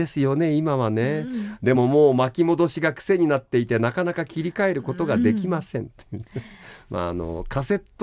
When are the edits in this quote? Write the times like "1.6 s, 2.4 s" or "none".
none